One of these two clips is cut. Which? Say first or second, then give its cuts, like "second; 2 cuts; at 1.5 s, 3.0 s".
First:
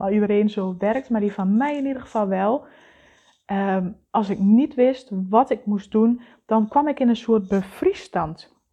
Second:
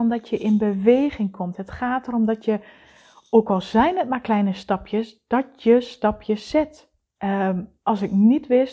second; 1 cut; at 7.2 s